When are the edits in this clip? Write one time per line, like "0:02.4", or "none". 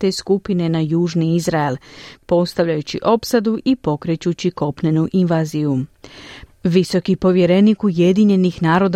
0:02.2
0:06.5